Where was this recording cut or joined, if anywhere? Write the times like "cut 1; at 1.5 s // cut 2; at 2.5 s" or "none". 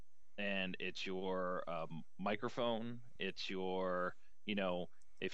none